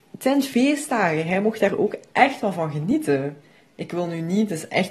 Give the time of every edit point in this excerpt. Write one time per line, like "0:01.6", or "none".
none